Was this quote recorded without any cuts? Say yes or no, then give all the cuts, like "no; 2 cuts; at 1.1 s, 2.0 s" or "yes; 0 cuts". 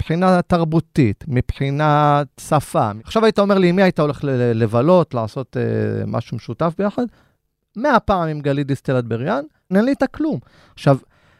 no; 1 cut; at 9.7 s